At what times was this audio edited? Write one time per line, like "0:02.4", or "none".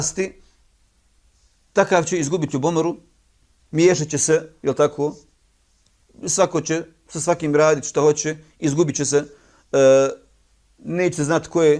none